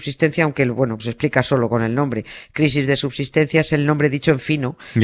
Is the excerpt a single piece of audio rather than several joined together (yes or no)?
no